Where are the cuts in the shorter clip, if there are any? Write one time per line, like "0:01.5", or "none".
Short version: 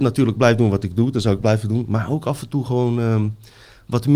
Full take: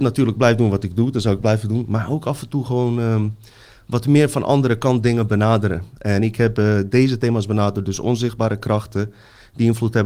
none